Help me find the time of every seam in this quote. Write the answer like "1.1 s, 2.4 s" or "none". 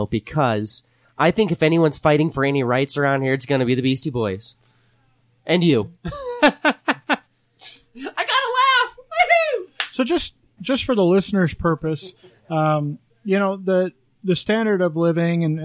none